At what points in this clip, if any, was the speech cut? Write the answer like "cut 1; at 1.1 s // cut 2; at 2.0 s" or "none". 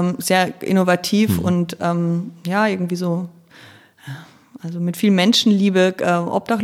none